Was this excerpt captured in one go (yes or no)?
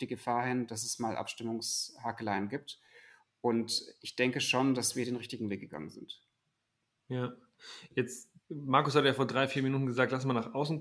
yes